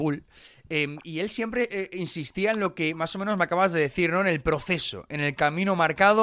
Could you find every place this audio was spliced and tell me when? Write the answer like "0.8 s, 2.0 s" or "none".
none